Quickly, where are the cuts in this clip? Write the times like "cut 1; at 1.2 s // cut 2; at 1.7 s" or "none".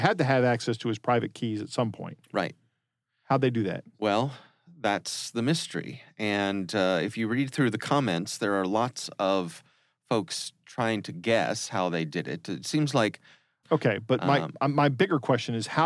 cut 1; at 13.6 s